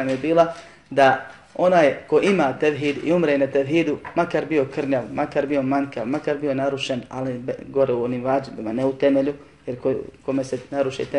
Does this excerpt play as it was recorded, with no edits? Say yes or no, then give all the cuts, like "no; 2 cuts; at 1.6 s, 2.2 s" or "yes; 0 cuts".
yes; 0 cuts